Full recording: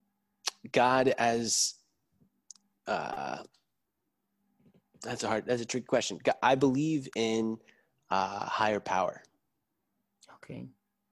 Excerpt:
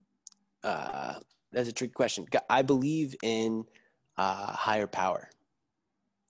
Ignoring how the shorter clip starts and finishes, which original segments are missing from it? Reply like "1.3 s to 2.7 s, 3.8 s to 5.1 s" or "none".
3.8 s to 5.4 s